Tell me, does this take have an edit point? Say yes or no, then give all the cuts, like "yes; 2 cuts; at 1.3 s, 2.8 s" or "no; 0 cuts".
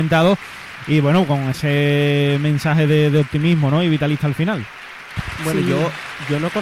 no; 0 cuts